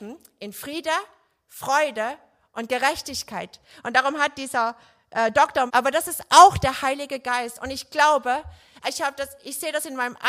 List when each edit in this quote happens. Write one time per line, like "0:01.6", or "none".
0:05.7
0:08.8